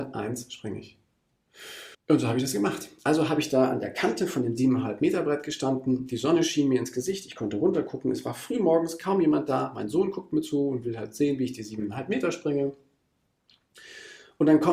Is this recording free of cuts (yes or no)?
no